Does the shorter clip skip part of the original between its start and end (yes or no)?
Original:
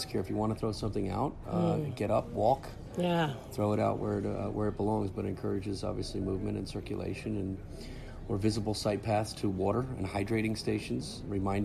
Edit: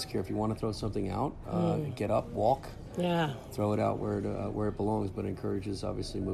no